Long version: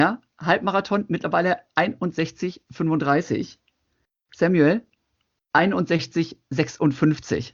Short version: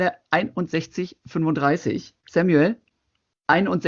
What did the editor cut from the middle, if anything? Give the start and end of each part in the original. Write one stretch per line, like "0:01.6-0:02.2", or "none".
0:03.6-0:04.2